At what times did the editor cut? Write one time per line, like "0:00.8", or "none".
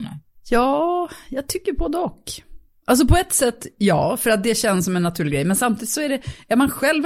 none